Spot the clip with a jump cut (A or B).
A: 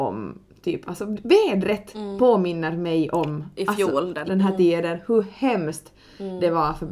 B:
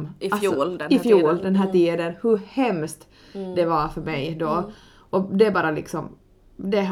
A